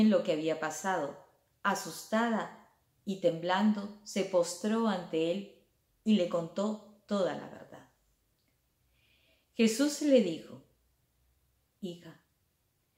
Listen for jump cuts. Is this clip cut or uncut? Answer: uncut